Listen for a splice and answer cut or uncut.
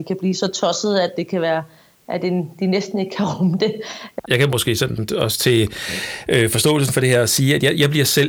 cut